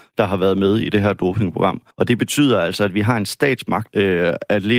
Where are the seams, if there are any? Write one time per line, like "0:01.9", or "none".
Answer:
0:01.9
0:03.9